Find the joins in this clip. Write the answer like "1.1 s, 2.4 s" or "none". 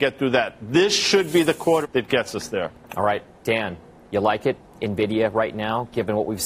1.8 s